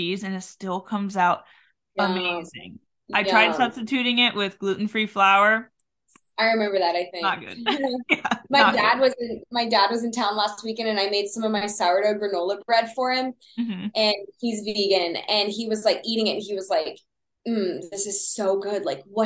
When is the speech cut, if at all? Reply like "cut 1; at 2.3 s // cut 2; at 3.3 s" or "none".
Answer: none